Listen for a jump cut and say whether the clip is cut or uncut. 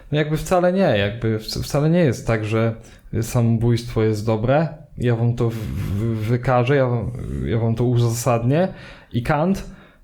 uncut